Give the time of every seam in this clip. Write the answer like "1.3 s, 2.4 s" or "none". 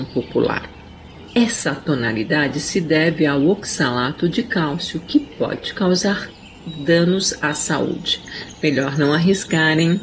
1.3 s